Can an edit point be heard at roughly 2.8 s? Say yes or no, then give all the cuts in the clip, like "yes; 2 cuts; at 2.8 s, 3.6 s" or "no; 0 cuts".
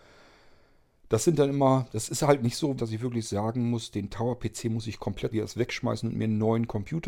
yes; 2 cuts; at 2.8 s, 5.3 s